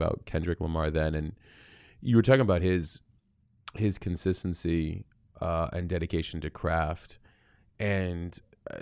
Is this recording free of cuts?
yes; 0 cuts

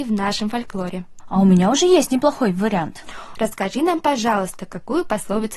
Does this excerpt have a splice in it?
yes; 1 cut; at 3.3 s

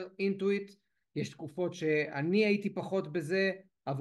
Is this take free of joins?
yes; 0 cuts

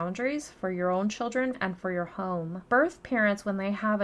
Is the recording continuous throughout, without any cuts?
no; 2 cuts; at 1.5 s, 2.6 s

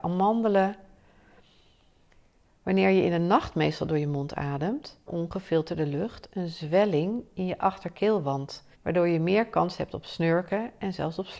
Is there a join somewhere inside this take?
yes; 2 cuts; at 5.1 s, 8.7 s

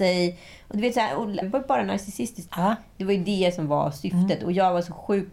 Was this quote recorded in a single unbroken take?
no; 2 cuts; at 1.4 s, 2.5 s

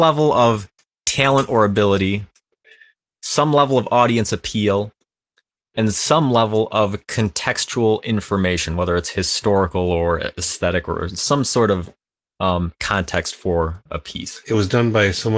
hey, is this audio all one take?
no; 1 cut; at 14.4 s

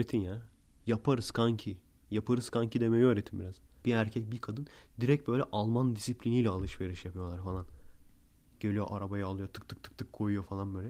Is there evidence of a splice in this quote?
yes; 1 cut; at 3.8 s

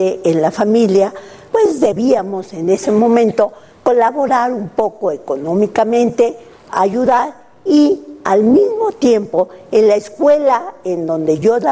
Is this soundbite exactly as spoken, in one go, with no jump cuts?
no; 1 cut; at 1.5 s

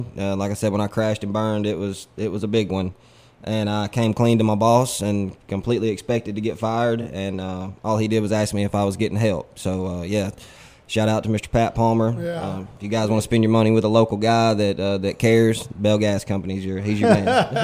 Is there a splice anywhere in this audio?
no; 0 cuts

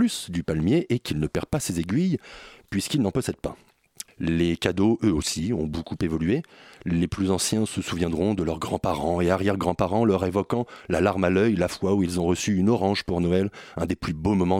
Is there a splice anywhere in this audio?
yes; 1 cut; at 4.1 s

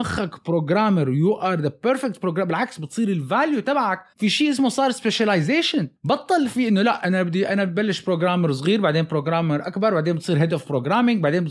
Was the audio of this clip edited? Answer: yes; 1 cut; at 4.1 s

